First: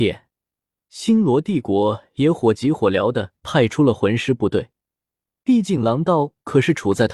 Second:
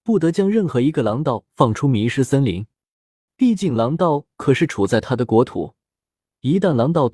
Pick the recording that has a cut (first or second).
second